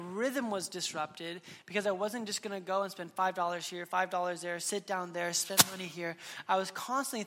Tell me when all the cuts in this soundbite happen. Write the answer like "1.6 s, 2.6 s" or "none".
none